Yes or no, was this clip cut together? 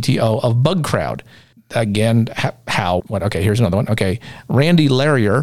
yes